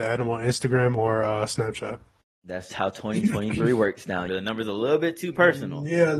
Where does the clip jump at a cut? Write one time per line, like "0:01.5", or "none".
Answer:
0:02.7
0:04.3